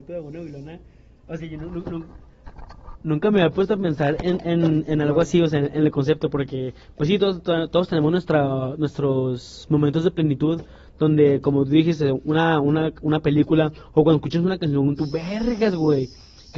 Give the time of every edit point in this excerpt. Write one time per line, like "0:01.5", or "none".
0:15.0

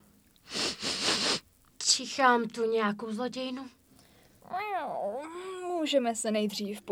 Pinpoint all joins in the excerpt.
0:01.7

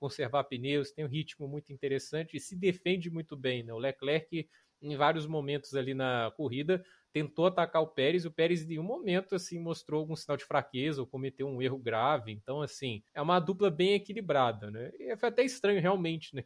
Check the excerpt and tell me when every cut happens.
0:13.1

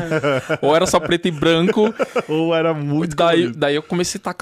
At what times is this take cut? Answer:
none

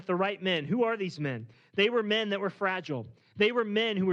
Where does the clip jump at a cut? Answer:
none

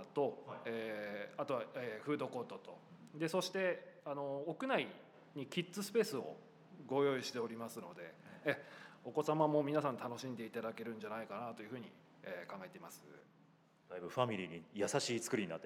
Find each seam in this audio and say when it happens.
none

